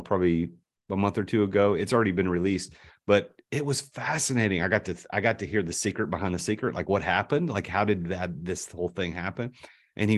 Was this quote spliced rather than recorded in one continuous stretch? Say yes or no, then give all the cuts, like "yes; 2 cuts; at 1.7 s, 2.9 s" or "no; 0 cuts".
no; 0 cuts